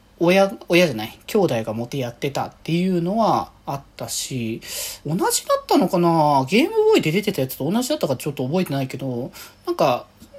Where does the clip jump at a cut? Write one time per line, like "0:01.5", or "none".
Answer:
0:01.9
0:05.0